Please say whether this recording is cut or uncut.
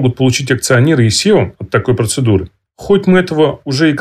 uncut